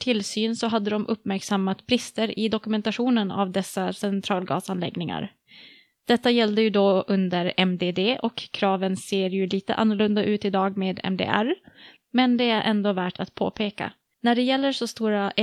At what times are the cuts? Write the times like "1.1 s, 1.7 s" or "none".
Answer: 14.1 s